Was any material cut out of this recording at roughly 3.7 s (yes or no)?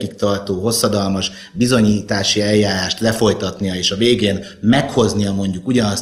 no